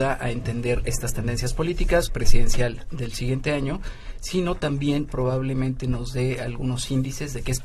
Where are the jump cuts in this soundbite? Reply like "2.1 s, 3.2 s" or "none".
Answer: 2.1 s